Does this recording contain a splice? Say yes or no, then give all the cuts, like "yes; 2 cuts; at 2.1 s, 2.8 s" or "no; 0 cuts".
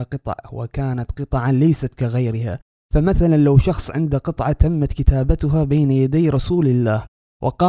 no; 0 cuts